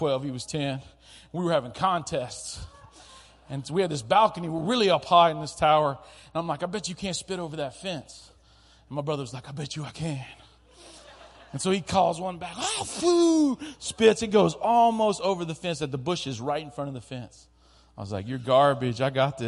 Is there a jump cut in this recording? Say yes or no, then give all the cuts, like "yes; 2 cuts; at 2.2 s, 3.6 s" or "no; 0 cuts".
no; 0 cuts